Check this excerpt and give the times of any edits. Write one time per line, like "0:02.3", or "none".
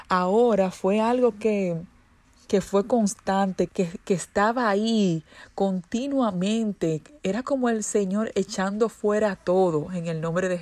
0:03.7

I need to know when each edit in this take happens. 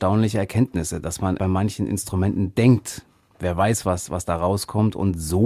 0:01.4

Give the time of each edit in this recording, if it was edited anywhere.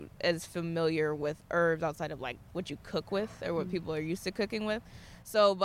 none

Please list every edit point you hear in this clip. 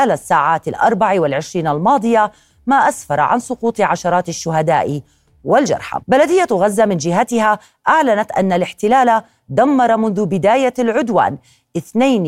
0:06.0

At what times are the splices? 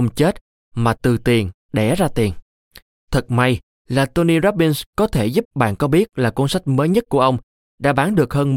0:05.4

